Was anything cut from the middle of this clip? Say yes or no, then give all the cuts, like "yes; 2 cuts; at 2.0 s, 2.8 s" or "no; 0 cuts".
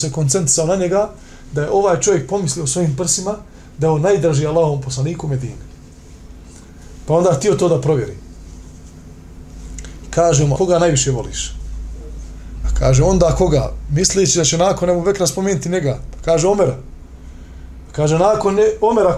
yes; 2 cuts; at 10.6 s, 12.6 s